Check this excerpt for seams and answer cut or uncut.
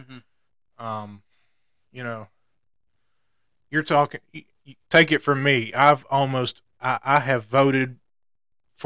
cut